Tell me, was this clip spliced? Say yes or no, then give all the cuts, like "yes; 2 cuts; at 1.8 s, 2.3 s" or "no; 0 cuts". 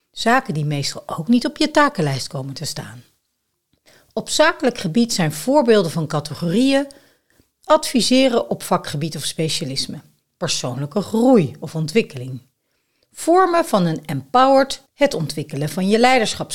yes; 1 cut; at 14.8 s